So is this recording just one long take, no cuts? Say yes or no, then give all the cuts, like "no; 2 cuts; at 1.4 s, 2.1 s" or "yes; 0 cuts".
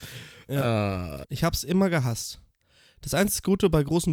no; 1 cut; at 1.2 s